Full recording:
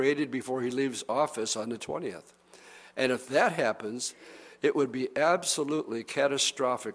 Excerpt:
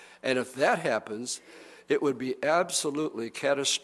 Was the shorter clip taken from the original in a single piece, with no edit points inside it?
yes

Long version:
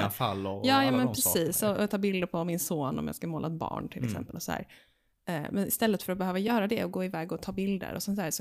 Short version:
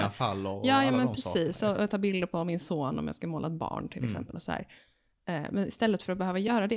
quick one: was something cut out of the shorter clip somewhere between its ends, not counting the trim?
no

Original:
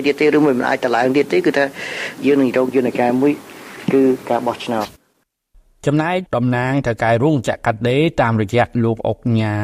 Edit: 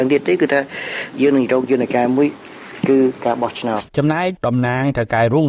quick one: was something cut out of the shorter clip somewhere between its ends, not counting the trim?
yes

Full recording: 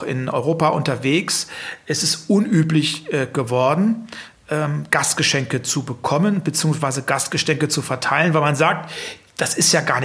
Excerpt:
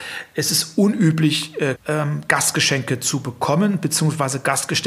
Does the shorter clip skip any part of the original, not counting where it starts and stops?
yes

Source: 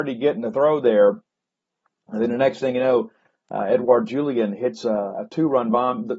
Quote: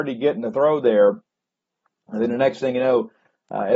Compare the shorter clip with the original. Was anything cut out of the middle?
no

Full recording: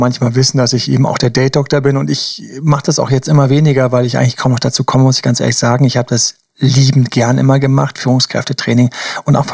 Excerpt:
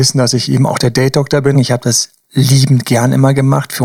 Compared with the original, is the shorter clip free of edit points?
no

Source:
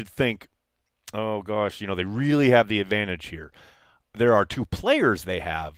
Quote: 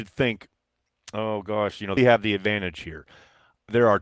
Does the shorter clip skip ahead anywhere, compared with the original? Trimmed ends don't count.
yes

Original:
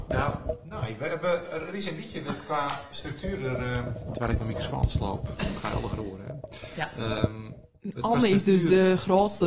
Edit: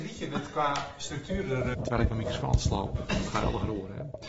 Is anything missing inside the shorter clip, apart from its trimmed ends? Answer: yes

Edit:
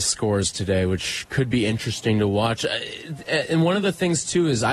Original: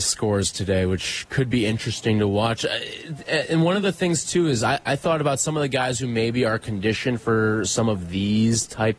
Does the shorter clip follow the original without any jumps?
yes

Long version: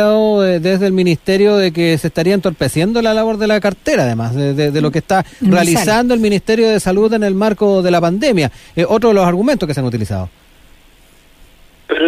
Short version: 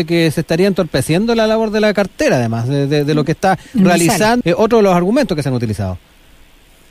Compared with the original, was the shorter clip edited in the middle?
yes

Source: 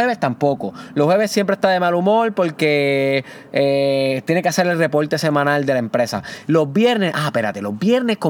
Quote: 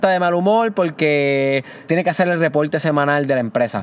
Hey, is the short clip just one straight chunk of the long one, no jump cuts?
no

